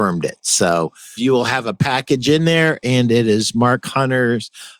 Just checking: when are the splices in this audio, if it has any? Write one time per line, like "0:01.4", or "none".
0:01.2